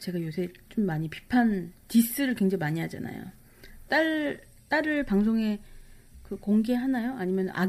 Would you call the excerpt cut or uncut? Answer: cut